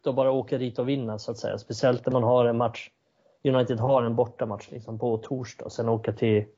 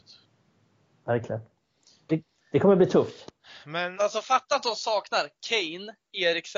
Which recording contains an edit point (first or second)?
second